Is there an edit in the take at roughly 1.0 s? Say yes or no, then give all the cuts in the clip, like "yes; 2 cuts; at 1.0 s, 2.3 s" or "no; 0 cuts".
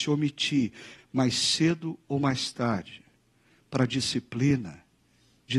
yes; 1 cut; at 1.0 s